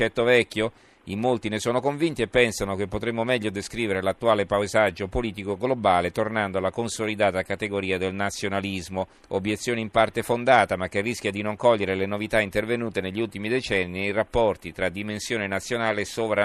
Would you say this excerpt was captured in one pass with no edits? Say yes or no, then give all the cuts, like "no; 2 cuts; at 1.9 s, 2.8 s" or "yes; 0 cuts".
no; 1 cut; at 9.2 s